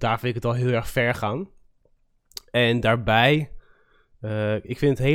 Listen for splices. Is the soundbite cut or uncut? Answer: uncut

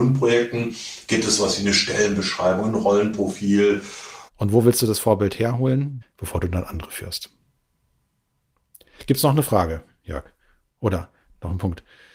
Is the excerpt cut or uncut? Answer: cut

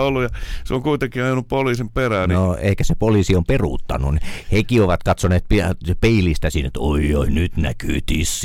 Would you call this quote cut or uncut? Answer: uncut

